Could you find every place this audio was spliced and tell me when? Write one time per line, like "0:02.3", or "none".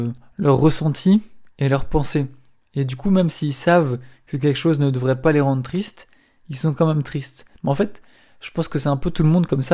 none